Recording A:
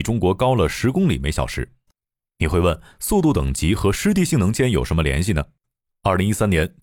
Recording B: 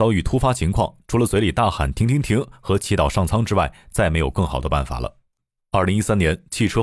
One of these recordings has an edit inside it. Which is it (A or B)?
B